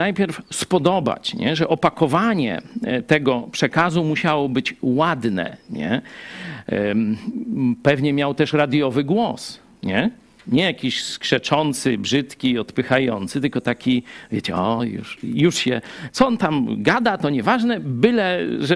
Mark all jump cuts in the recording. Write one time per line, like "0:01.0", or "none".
none

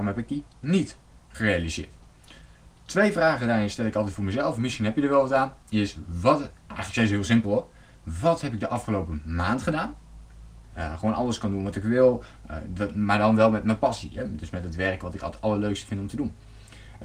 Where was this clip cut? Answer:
0:05.6
0:10.6

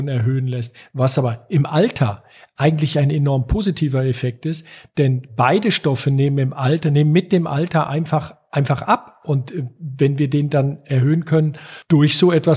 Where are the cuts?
none

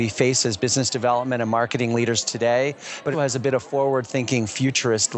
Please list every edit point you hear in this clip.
0:03.1

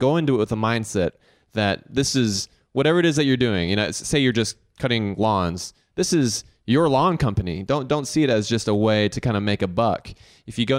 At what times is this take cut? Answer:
none

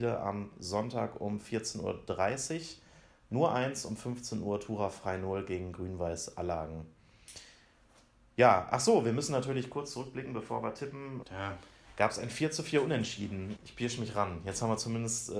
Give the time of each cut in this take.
0:11.2
0:13.6

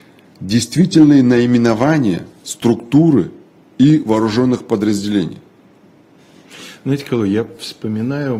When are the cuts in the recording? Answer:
none

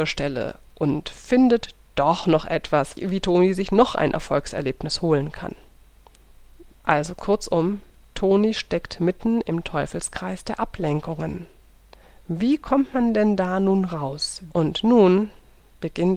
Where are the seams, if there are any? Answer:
0:06.7
0:14.5

